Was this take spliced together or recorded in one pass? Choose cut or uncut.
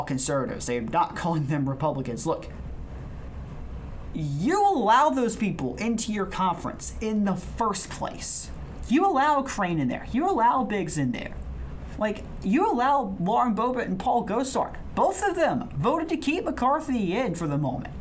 uncut